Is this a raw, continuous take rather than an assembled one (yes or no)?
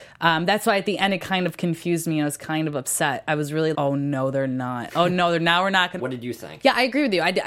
no